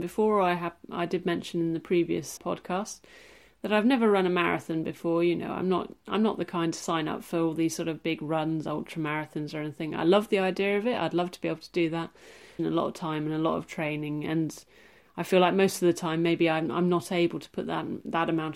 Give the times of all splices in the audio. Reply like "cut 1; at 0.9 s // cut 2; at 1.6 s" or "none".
cut 1; at 2.4 s // cut 2; at 12.6 s